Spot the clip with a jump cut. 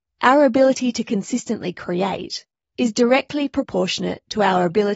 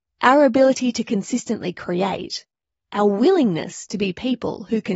first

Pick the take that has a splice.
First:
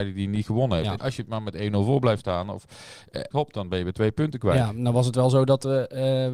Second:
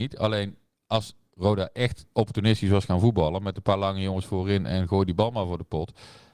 first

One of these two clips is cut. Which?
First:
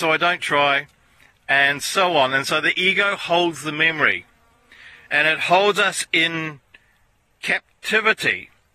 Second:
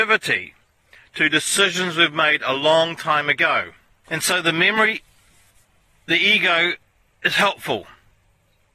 second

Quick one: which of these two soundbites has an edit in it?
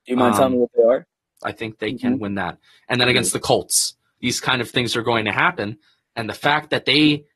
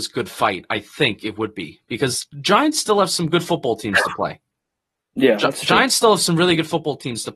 first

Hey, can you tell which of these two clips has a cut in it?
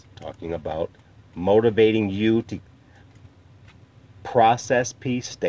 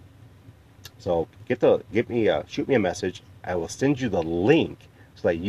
second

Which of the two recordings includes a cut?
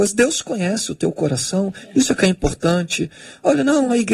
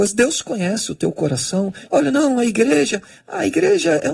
second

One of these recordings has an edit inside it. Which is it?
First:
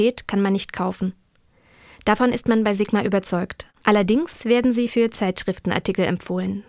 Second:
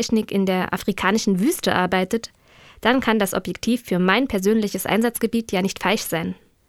first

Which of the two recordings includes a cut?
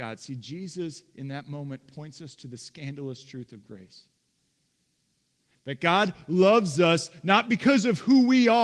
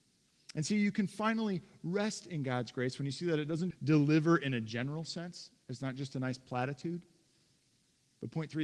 second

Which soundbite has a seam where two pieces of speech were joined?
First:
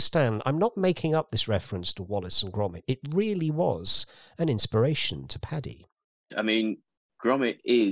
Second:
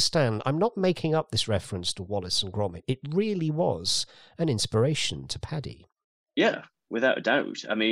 first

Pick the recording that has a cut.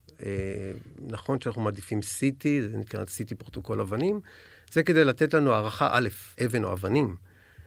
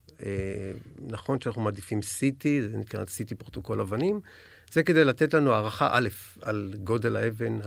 first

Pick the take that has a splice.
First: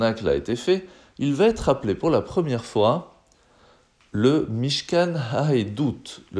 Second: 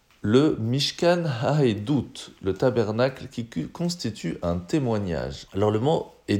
second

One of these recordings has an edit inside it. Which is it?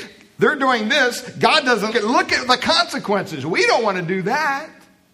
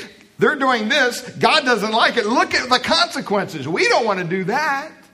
first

